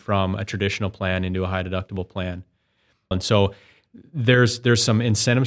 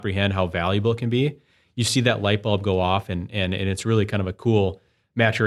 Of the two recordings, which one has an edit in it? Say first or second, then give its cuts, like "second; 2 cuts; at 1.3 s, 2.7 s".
first; 1 cut; at 3.1 s